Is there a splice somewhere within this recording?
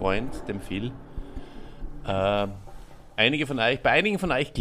no; 0 cuts

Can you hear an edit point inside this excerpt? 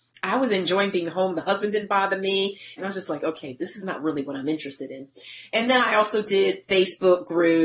yes; 1 cut; at 2.8 s

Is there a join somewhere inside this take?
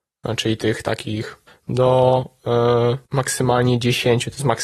yes; 2 cuts; at 1.5 s, 3.1 s

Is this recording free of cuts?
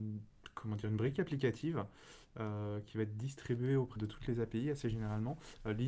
no; 1 cut; at 4.0 s

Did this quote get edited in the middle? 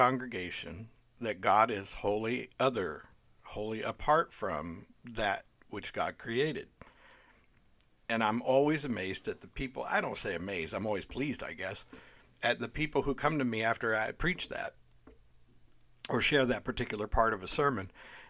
no; 0 cuts

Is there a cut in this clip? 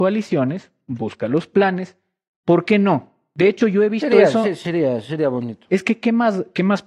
no; 0 cuts

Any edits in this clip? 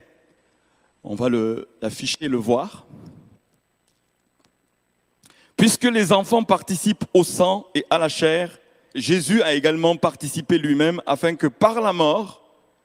yes; 1 cut; at 8.9 s

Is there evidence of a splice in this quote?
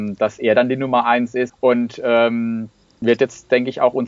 yes; 2 cuts; at 1.5 s, 3.0 s

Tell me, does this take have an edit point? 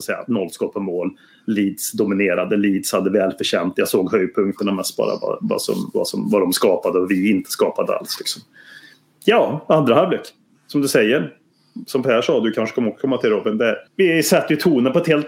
yes; 1 cut; at 13.9 s

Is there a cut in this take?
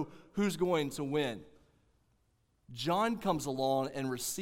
no; 0 cuts

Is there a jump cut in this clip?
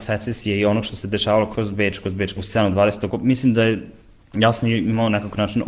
yes; 1 cut; at 3.1 s

